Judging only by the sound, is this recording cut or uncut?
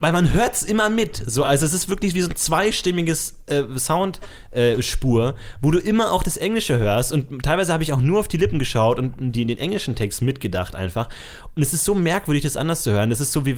uncut